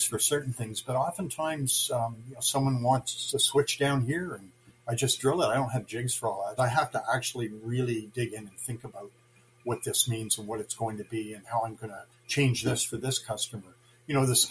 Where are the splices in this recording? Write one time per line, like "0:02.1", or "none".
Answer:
0:06.6